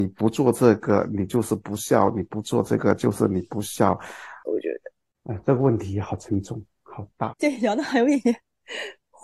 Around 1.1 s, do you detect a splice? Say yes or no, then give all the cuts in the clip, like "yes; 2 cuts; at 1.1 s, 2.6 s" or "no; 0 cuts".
no; 2 cuts; at 4.5 s, 7.3 s